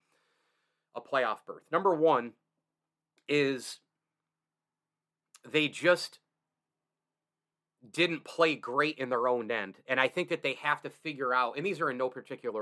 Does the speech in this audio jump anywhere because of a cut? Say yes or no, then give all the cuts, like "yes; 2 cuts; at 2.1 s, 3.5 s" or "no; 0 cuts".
no; 0 cuts